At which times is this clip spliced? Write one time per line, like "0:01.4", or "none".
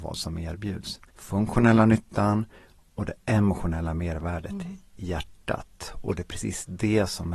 0:01.1